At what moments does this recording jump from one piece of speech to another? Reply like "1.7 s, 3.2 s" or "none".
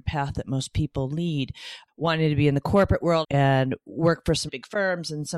1.9 s, 3.2 s, 4.5 s